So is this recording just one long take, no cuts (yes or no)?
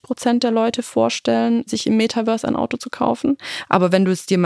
yes